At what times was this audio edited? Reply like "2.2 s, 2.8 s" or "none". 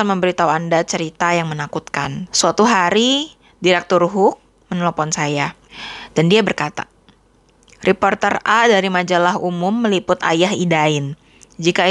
2.3 s